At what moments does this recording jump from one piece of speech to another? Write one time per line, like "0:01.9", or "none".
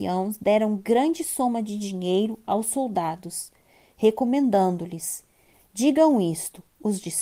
none